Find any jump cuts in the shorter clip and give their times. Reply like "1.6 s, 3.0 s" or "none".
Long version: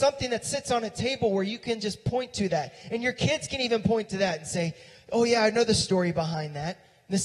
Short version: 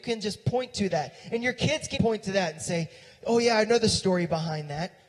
2.0 s